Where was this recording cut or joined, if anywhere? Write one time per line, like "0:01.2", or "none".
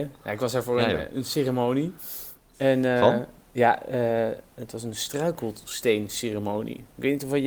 none